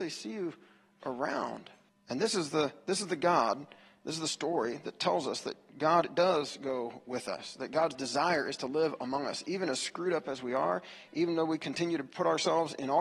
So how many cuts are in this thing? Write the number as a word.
one